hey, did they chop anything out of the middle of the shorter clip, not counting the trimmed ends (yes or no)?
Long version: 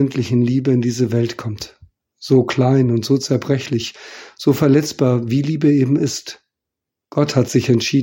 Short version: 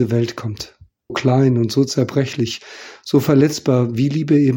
yes